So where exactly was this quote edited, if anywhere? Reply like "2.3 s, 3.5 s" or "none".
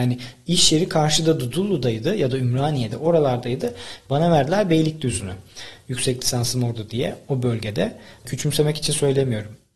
8.3 s